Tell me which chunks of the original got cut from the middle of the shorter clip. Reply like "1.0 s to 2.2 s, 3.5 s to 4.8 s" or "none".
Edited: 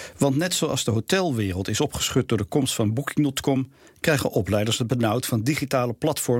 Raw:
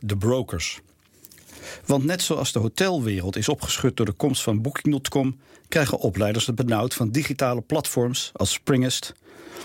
none